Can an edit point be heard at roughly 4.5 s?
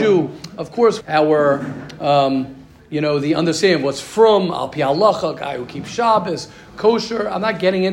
no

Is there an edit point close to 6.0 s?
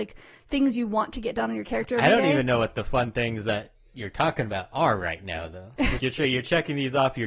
yes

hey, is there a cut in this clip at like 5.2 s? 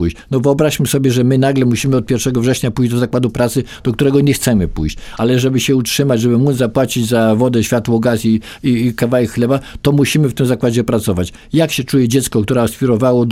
no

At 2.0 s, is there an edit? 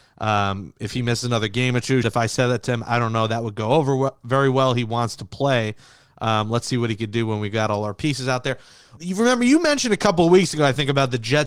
yes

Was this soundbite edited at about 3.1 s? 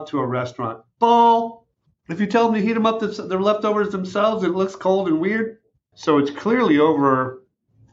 no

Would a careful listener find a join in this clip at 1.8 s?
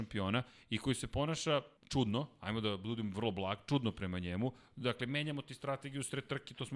yes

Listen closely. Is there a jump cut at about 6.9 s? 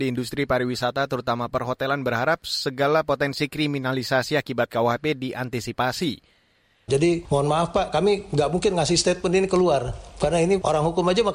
yes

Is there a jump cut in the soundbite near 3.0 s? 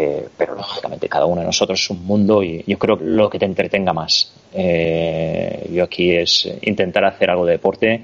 yes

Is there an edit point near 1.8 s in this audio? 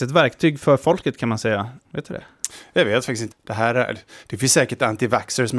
yes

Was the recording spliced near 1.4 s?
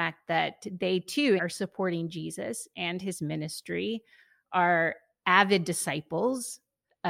yes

